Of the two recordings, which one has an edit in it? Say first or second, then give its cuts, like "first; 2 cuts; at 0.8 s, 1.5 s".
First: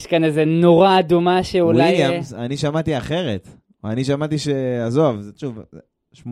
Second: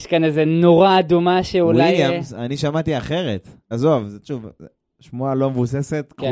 second; 1 cut; at 3.7 s